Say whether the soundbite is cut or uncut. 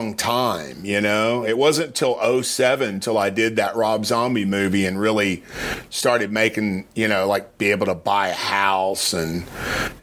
uncut